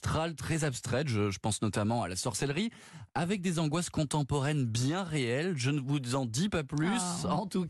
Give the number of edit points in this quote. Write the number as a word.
zero